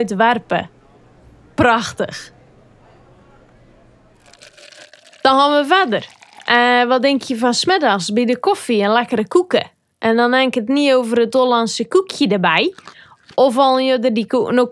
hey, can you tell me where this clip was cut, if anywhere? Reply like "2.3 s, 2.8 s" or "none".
none